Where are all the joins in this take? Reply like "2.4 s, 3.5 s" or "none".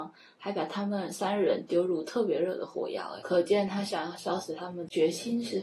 3.2 s

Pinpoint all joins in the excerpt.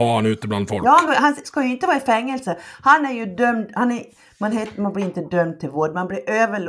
1.1 s

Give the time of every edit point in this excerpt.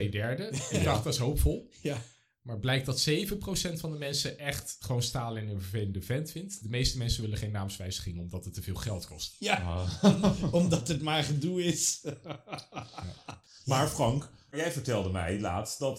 none

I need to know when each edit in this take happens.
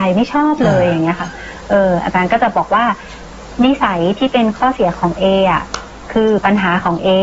none

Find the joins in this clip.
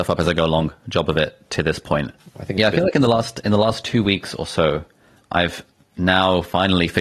2.2 s, 5.2 s

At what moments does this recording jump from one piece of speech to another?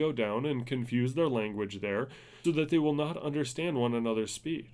2.4 s

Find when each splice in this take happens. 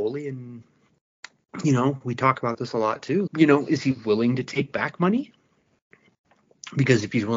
3.3 s

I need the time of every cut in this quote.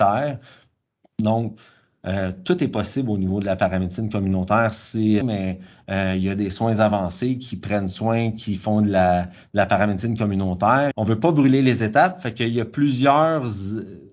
5.2 s, 10.9 s

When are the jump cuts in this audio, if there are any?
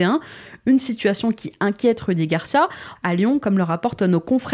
3.0 s

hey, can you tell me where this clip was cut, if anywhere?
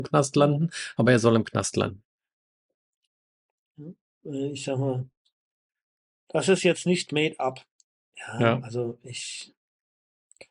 none

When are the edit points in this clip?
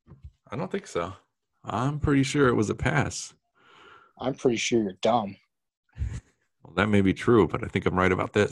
1.5 s

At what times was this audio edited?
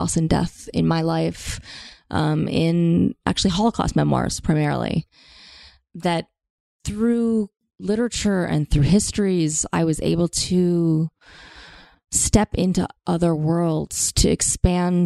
none

